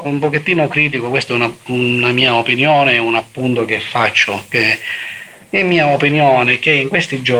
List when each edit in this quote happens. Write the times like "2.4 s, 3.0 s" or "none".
none